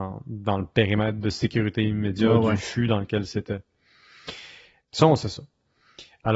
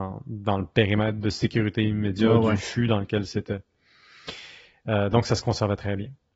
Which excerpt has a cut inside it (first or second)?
first